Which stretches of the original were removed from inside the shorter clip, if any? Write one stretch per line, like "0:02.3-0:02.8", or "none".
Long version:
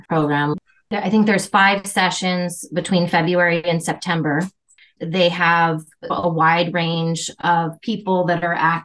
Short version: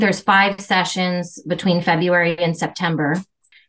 none

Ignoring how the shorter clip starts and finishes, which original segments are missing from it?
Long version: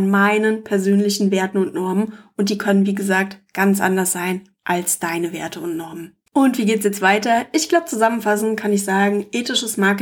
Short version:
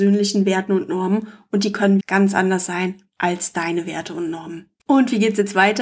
0:02.9-0:03.5

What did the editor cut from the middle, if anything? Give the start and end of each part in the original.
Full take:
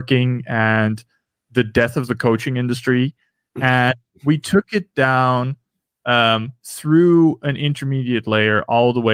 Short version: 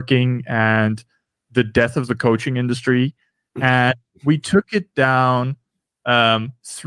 none

